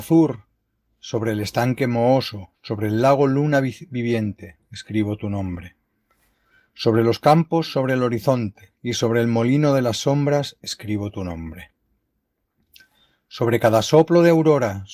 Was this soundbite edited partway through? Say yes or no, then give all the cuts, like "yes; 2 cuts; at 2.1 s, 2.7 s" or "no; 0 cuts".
yes; 1 cut; at 8.7 s